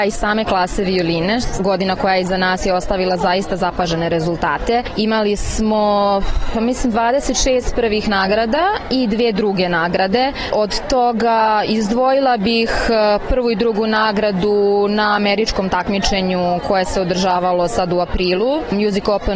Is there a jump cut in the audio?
no; 0 cuts

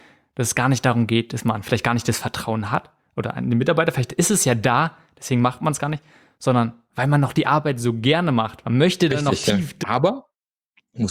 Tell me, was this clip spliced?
yes; 1 cut; at 9.8 s

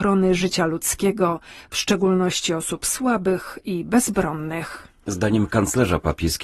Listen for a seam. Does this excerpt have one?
no; 0 cuts

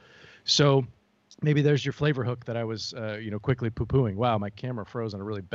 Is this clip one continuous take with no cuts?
yes; 0 cuts

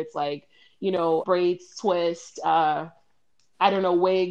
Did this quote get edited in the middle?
yes; 1 cut; at 1.2 s

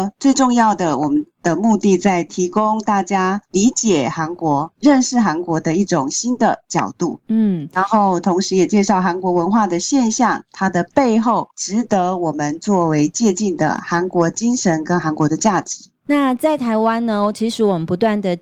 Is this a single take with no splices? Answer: yes; 0 cuts

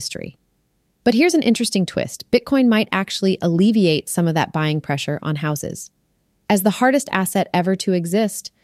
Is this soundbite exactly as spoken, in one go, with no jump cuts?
yes; 0 cuts

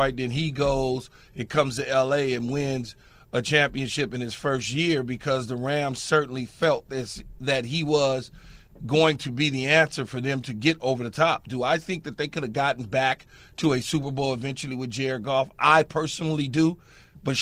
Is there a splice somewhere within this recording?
no; 0 cuts

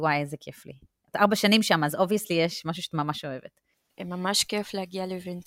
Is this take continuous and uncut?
no; 1 cut; at 3.9 s

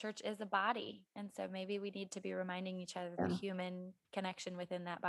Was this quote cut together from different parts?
no; 0 cuts

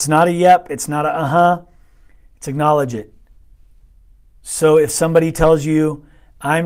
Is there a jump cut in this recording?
no; 0 cuts

